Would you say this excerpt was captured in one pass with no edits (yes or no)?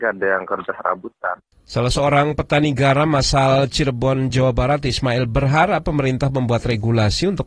yes